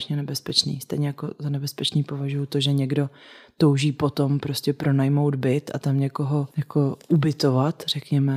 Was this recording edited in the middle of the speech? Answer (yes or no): yes